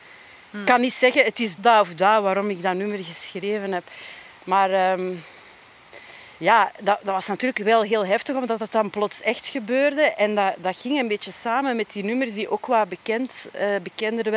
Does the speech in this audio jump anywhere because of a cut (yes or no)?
yes